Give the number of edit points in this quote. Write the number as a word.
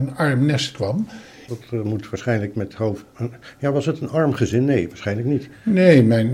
one